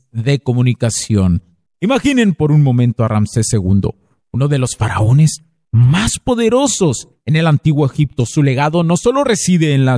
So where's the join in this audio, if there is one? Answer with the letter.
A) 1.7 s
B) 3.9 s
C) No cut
A